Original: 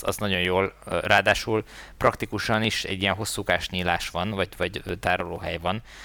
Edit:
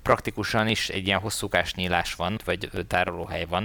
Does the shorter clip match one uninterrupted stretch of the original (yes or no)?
no